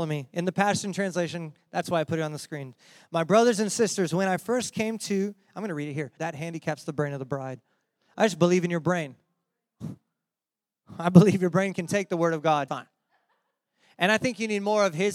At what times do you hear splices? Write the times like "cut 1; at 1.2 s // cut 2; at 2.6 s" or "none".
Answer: cut 1; at 6.2 s // cut 2; at 12.7 s